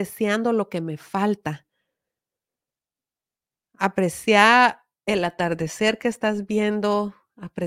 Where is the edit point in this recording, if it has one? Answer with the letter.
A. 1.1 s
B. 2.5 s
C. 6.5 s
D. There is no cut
D